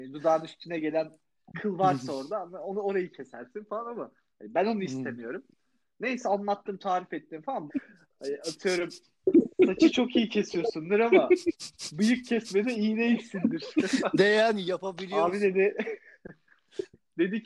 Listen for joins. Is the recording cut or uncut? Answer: cut